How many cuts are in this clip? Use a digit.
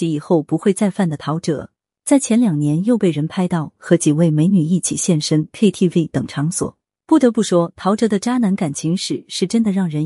0